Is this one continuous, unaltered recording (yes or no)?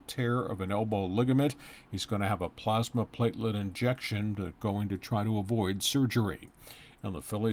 yes